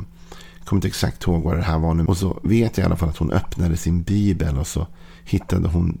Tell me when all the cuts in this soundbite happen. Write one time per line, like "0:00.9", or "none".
0:02.1